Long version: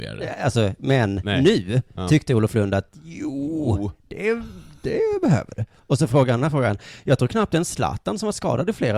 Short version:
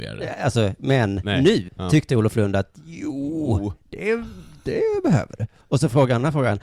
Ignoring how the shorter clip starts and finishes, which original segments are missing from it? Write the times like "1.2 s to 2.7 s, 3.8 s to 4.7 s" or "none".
1.7 s to 1.9 s